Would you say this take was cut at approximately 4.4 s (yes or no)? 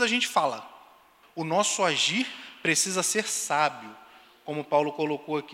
no